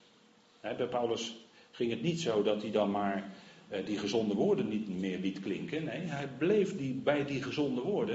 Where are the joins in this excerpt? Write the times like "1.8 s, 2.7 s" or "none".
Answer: none